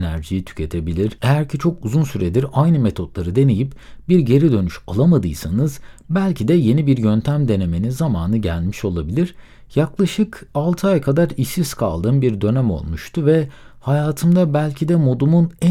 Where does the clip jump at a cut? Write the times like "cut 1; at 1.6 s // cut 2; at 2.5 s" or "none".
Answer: none